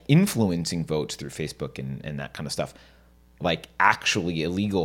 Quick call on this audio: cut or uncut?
cut